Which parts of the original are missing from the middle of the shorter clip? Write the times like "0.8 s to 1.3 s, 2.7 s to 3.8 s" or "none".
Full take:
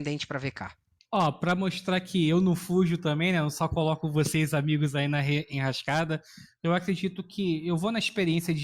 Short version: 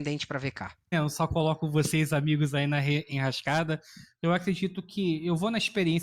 0.9 s to 3.3 s